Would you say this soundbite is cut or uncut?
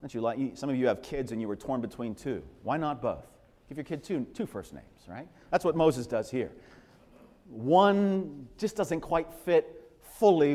uncut